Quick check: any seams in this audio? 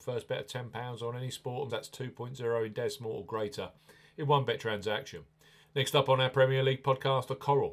yes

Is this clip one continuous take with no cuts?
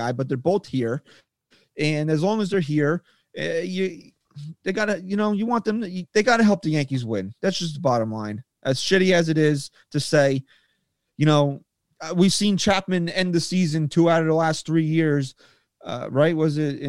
yes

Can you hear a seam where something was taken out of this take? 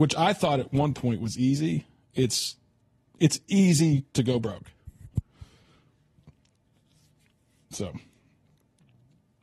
no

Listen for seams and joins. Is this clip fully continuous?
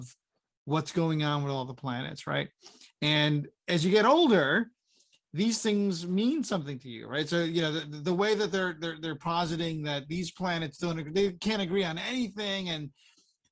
yes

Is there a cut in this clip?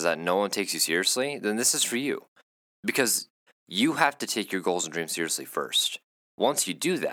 yes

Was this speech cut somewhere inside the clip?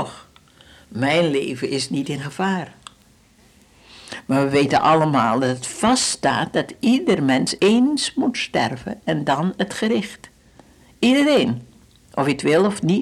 no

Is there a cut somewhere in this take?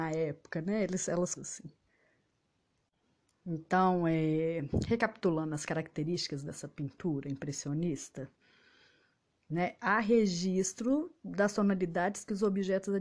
yes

